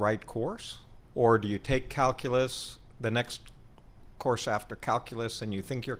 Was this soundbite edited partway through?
yes; 1 cut; at 1.1 s

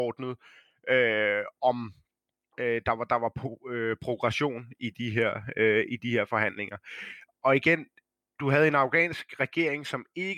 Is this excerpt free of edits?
yes; 0 cuts

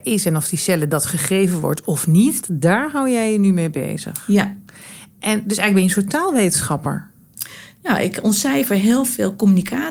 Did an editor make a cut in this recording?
yes; 1 cut; at 2.4 s

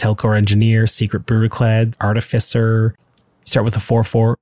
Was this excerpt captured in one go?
no; 1 cut; at 1.9 s

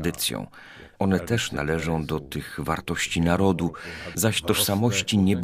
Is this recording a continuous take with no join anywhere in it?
no; 2 cuts; at 0.9 s, 4.1 s

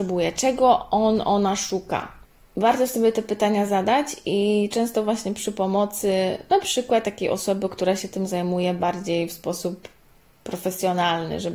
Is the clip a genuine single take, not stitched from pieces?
yes; 0 cuts

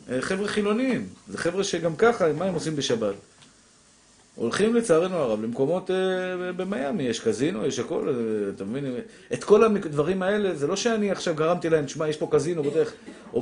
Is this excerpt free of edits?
yes; 0 cuts

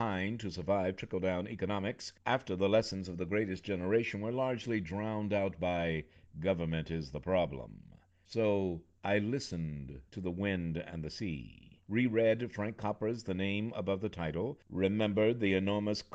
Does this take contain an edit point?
no; 0 cuts

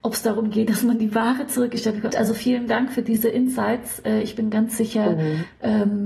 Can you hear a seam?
yes; 1 cut; at 2.1 s

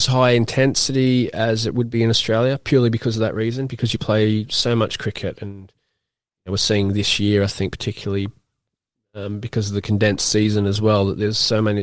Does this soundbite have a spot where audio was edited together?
no; 0 cuts

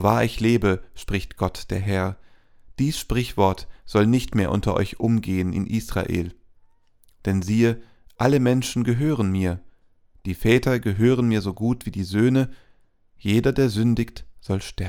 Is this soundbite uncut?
yes; 0 cuts

